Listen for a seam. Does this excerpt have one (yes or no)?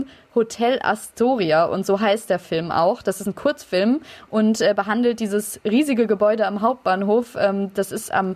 no